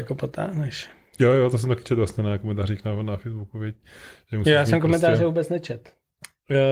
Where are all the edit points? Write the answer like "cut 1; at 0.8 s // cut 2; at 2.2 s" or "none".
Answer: none

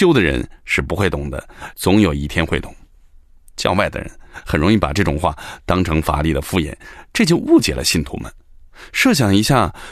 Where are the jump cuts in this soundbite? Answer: cut 1; at 1.7 s

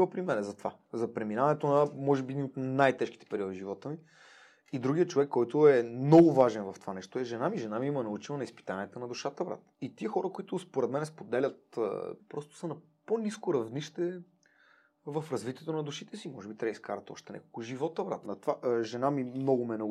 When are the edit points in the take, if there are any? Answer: cut 1; at 9.7 s // cut 2; at 12.2 s // cut 3; at 18.2 s

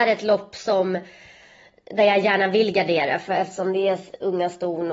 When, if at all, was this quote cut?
none

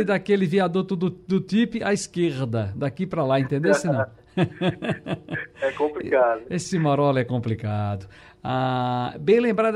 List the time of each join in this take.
cut 1; at 8.2 s

